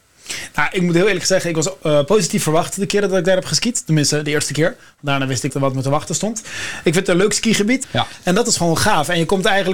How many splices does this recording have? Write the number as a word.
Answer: two